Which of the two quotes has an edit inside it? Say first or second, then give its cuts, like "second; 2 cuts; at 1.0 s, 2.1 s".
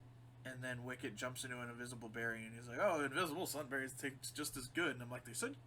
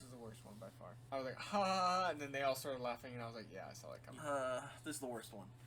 second; 2 cuts; at 1.1 s, 4.2 s